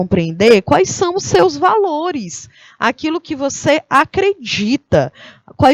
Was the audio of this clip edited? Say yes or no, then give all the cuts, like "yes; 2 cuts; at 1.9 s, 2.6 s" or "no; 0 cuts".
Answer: no; 0 cuts